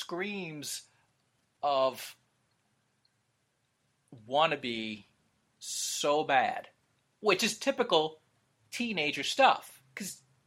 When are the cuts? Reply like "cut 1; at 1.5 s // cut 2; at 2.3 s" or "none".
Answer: none